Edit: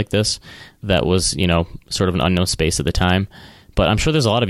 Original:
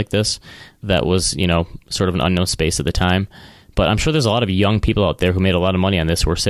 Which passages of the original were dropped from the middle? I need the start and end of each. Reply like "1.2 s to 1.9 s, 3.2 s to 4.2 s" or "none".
none